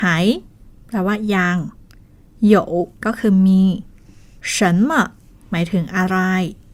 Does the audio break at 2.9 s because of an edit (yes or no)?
yes